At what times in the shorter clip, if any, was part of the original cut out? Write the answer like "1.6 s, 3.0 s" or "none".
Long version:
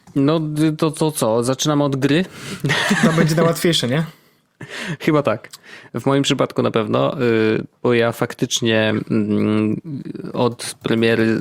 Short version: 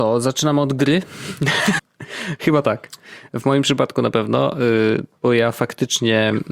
1.8 s

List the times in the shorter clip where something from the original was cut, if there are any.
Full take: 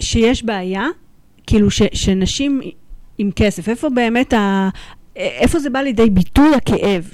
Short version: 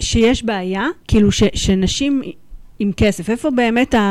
1.0 s

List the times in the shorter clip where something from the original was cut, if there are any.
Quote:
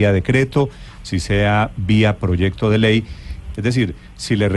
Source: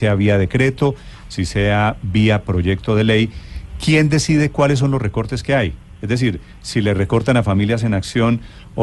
3.5 s

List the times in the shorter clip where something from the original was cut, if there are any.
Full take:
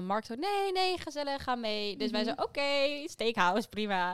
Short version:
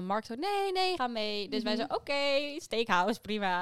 1.0 s

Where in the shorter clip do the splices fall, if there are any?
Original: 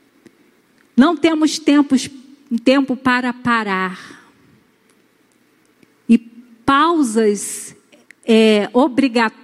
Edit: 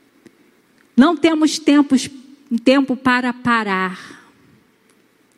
none

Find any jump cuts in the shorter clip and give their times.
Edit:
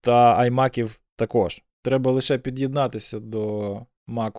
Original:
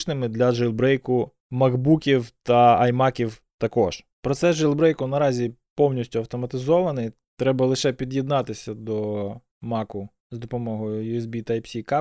1.7 s

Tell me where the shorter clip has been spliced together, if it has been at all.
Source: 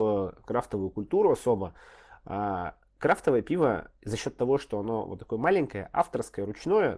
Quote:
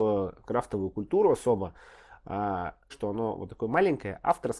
2.9 s

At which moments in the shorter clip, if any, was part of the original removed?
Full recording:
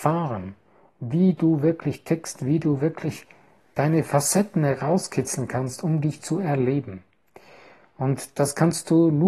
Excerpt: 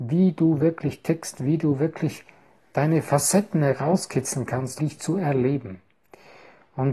4.8 s

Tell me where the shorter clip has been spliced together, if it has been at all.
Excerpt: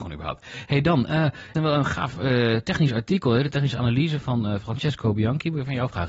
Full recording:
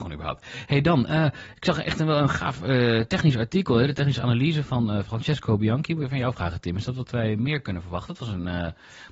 1.5 s

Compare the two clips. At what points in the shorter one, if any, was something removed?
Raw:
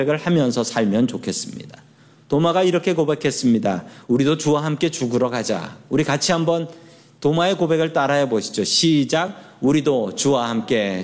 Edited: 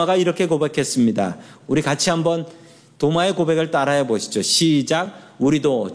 1.6 s

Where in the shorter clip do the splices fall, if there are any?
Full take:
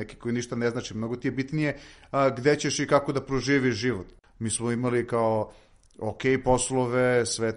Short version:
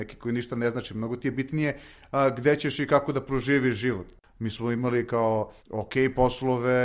5.6 s

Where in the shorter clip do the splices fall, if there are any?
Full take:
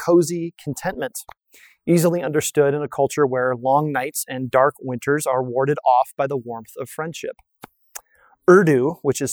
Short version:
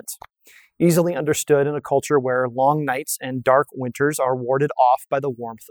none

